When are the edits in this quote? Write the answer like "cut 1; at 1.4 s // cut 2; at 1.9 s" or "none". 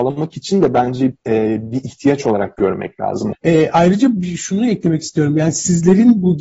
cut 1; at 3.3 s